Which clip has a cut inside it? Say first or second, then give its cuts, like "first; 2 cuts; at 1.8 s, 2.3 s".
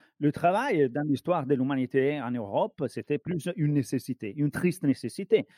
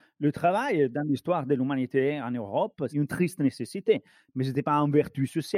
second; 1 cut; at 2.9 s